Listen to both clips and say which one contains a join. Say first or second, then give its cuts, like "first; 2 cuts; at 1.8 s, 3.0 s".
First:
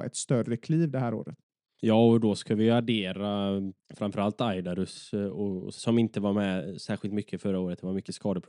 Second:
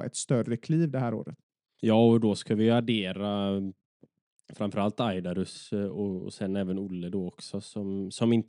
first; 2 cuts; at 3.8 s, 5.8 s